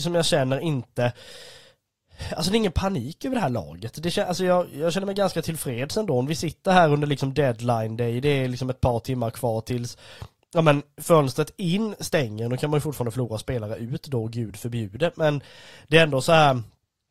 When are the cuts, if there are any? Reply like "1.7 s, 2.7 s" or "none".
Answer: none